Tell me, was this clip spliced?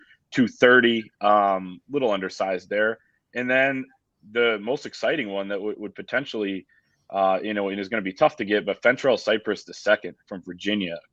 no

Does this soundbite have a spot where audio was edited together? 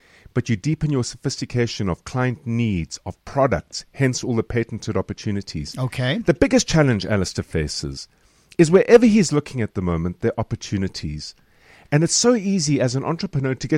no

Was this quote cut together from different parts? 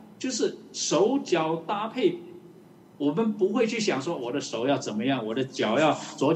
no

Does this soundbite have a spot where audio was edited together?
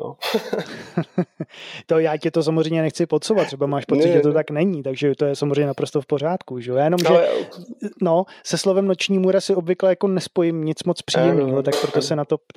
no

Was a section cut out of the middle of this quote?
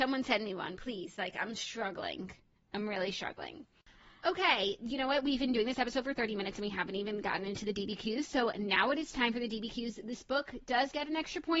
no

